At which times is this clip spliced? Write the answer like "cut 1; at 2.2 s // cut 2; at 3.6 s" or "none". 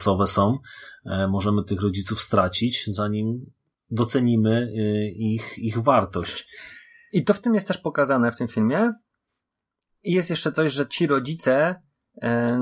none